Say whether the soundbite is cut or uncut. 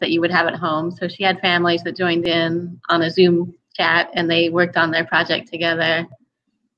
uncut